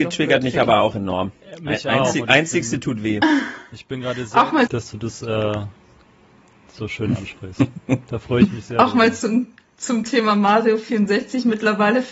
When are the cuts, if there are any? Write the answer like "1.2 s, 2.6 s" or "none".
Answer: 4.7 s